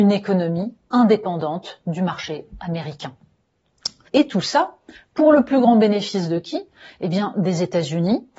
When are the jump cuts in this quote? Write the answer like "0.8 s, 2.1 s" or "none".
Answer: 4.1 s